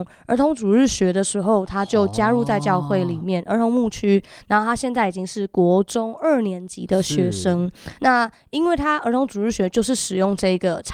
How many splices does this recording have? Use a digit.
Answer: 0